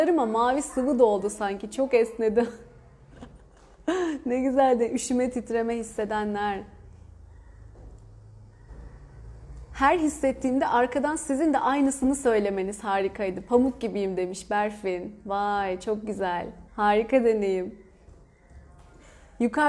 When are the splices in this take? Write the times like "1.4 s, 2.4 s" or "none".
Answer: 16.7 s